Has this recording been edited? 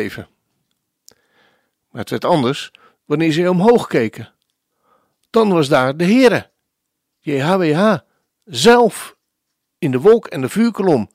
no; 0 cuts

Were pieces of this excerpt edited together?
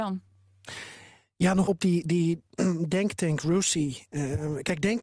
yes; 1 cut; at 1.7 s

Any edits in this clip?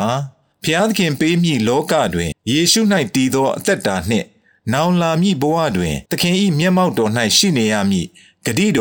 yes; 2 cuts; at 2.3 s, 6.1 s

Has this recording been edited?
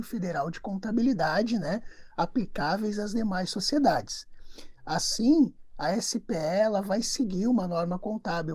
no; 0 cuts

